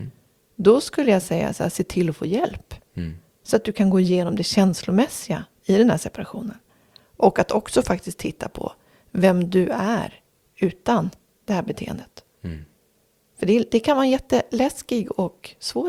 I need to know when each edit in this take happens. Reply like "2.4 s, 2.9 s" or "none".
none